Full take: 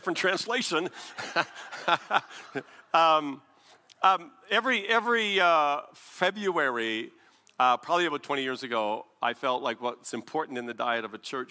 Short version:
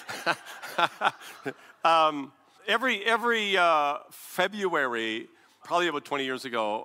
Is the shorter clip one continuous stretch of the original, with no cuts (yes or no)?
no